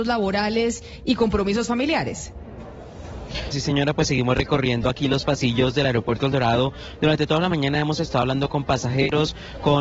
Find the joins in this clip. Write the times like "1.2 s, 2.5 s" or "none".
3.5 s